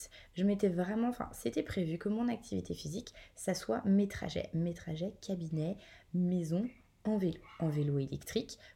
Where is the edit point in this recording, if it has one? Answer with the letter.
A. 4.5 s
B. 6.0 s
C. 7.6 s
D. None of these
D